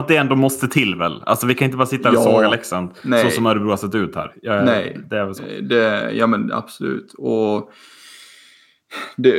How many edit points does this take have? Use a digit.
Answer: 0